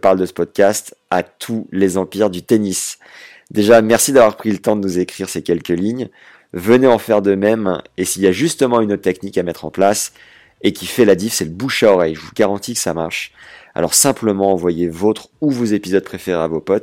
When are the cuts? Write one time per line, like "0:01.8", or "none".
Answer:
none